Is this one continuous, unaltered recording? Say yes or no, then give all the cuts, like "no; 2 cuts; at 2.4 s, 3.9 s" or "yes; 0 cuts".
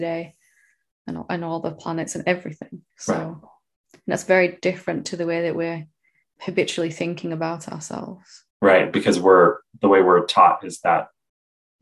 no; 3 cuts; at 2.9 s, 6.2 s, 8.5 s